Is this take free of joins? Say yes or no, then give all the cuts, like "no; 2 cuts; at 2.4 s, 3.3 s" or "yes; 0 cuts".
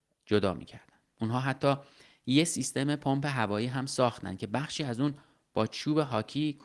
no; 1 cut; at 1.1 s